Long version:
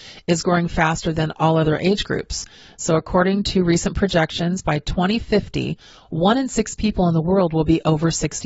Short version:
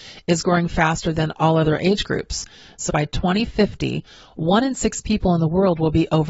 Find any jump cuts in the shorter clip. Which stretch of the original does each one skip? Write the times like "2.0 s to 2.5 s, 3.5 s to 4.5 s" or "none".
2.9 s to 4.6 s